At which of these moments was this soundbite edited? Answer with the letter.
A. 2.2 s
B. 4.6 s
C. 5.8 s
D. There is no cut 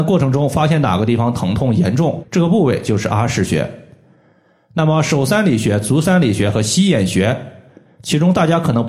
A